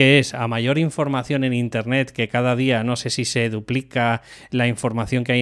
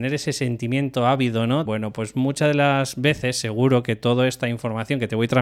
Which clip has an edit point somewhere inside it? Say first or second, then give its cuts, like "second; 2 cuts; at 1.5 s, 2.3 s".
second; 1 cut; at 1.7 s